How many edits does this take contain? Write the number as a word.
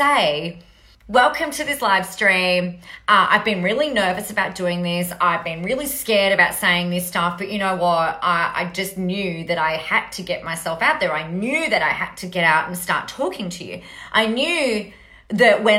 one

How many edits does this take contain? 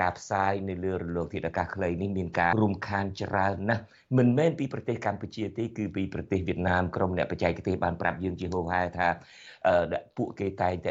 one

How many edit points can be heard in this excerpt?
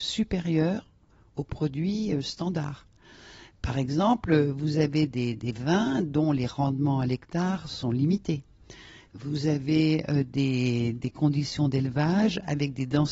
zero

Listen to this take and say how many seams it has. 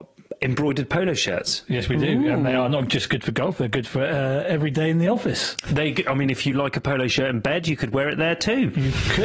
zero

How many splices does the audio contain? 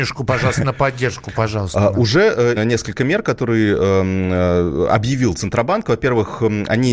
one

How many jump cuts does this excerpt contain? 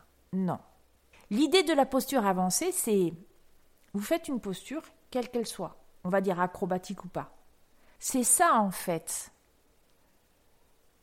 two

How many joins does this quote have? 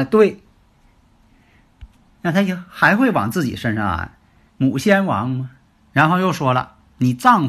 three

